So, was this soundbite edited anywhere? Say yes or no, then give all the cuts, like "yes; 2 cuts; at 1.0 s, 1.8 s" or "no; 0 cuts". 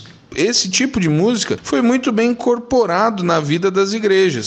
no; 0 cuts